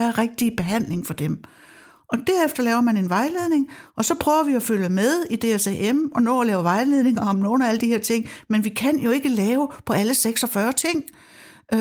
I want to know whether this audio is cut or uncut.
uncut